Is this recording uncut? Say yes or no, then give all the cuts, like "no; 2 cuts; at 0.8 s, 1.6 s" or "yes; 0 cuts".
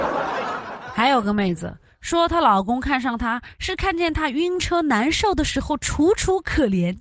yes; 0 cuts